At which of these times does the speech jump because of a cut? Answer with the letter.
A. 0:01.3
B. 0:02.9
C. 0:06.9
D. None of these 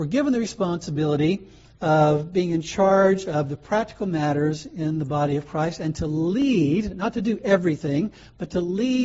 D